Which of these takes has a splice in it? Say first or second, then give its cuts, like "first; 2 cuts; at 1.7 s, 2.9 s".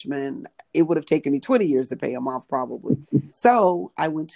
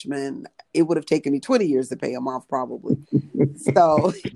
first; 1 cut; at 3.3 s